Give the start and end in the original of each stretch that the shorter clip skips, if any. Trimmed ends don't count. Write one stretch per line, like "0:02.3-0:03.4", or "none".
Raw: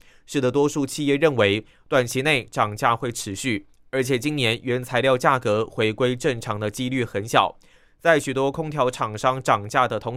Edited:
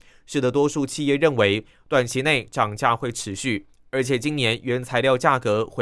none